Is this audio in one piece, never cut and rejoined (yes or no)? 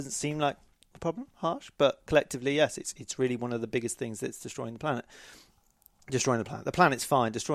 yes